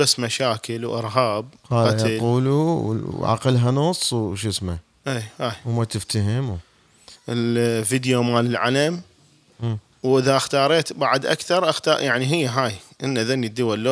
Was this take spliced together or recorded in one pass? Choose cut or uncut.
cut